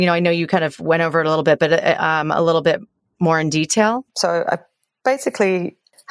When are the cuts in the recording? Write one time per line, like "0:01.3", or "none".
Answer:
0:04.1